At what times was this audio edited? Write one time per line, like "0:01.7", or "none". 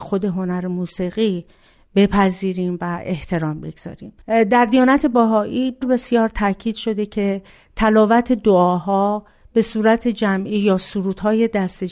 0:04.2
0:05.8